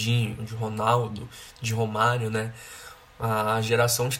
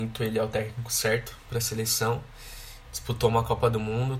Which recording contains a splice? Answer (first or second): second